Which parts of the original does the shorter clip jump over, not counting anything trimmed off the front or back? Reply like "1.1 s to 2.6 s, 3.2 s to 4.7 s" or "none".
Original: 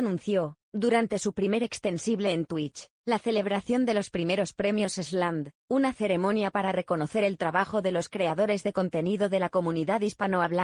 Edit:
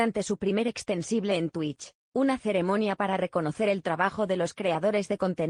3.0 s to 5.5 s